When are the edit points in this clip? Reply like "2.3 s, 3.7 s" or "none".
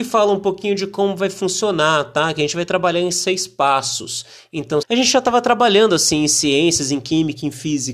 4.8 s